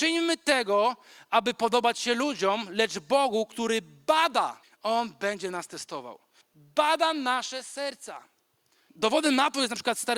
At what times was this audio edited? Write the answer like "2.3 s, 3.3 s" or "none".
4.6 s, 6.4 s, 8.9 s